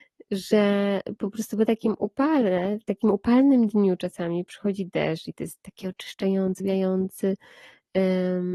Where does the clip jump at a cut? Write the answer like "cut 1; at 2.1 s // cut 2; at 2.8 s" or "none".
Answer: cut 1; at 6.6 s